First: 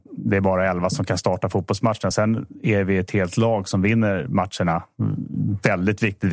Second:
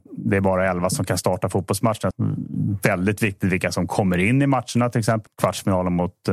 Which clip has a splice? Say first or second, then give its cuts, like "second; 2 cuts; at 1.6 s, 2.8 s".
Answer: second; 2 cuts; at 2.1 s, 5.3 s